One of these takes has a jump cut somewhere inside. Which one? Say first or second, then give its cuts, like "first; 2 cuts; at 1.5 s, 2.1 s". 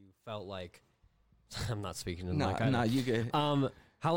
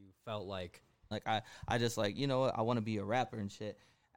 second; 1 cut; at 1.1 s